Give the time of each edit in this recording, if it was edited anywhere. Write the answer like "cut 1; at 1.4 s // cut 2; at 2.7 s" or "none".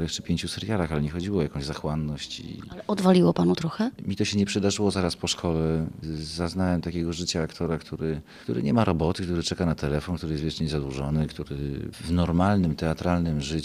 cut 1; at 4.0 s